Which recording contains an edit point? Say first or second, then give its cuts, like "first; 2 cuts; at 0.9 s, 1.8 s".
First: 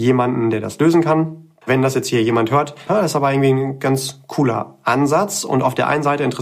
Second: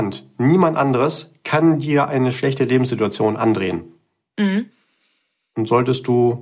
first; 2 cuts; at 1.6 s, 2.9 s